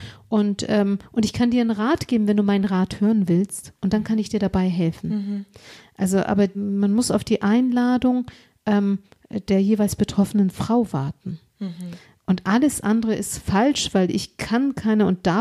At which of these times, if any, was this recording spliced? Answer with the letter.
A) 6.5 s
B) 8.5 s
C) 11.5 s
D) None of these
A